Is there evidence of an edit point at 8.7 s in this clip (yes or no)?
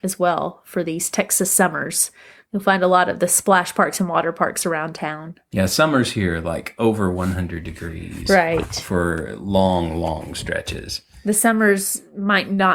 no